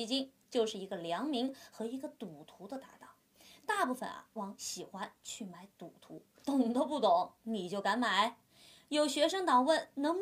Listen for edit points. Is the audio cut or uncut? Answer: cut